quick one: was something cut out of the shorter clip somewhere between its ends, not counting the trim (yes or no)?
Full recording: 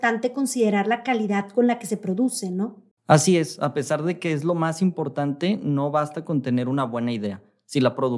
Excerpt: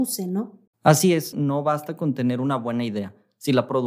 yes